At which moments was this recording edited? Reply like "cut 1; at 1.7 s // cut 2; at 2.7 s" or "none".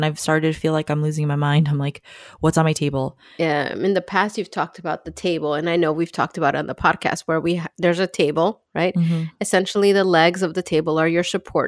cut 1; at 3.4 s